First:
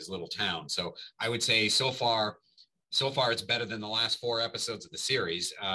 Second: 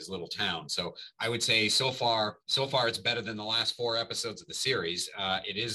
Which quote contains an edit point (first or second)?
second